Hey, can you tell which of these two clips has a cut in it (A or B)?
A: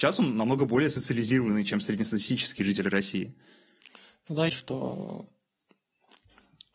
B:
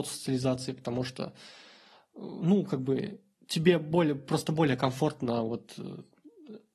A